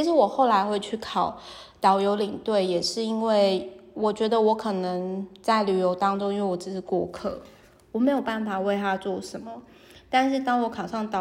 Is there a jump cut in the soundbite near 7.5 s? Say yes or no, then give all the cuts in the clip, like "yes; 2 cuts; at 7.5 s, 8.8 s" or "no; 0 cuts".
no; 0 cuts